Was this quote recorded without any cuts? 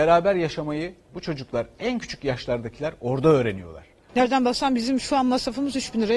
no; 1 cut; at 4.1 s

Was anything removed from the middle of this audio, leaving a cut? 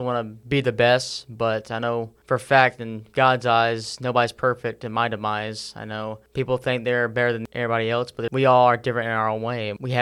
no; 0 cuts

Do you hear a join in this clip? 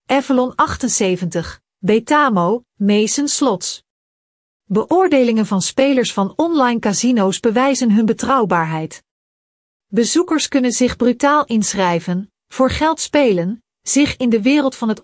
no; 0 cuts

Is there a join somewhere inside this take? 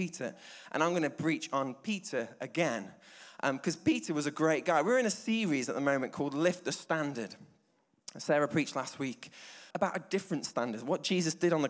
yes; 1 cut; at 9.7 s

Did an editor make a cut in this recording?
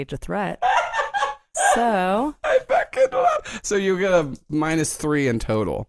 no; 0 cuts

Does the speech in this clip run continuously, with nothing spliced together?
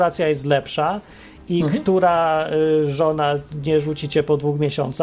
yes; 0 cuts

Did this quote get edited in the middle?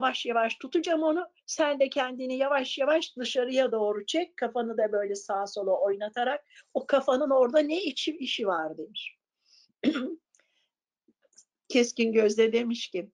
no; 0 cuts

